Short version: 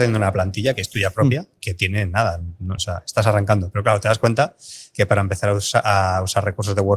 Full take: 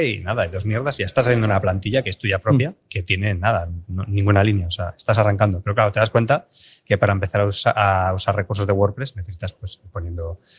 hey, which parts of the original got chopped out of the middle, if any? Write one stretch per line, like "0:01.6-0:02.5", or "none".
0:04.1-0:04.7